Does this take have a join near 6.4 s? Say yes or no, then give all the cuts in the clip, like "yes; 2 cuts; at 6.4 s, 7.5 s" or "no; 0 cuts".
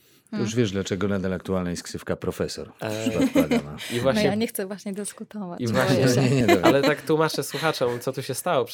yes; 1 cut; at 6.4 s